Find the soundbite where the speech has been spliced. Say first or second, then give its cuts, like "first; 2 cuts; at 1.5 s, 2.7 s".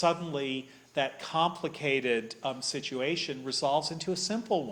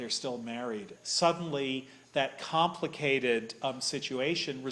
second; 1 cut; at 1.0 s